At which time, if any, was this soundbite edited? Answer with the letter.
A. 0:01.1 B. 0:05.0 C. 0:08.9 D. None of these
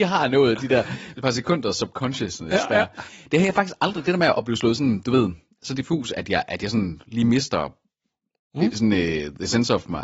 A